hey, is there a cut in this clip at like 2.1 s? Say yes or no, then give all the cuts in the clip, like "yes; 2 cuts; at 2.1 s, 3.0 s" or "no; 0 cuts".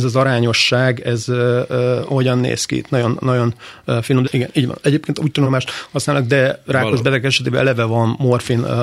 no; 2 cuts; at 4.2 s, 5.4 s